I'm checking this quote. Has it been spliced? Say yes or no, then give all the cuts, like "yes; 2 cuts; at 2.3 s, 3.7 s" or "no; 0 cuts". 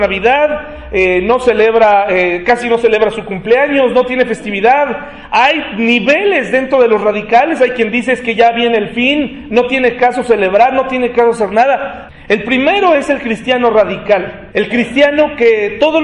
yes; 2 cuts; at 12.1 s, 14.5 s